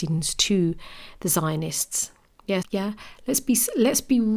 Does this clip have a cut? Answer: yes; 1 cut; at 2.6 s

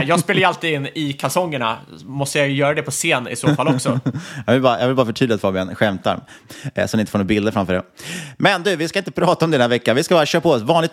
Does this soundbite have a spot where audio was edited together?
no; 0 cuts

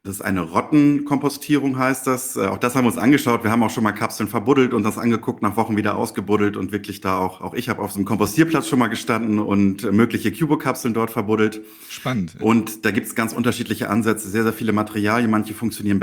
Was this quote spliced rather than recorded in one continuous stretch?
no; 0 cuts

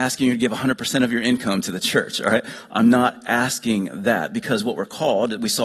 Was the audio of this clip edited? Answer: no; 0 cuts

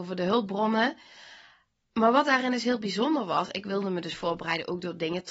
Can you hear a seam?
no; 0 cuts

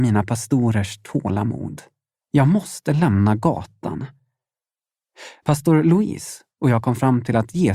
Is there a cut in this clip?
yes; 2 cuts; at 2.2 s, 5.4 s

